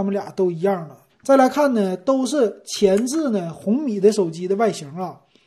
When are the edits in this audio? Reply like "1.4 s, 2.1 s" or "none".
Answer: 1.1 s